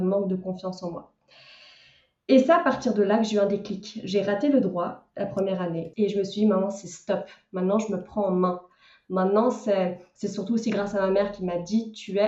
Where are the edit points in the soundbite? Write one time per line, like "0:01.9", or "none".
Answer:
0:05.9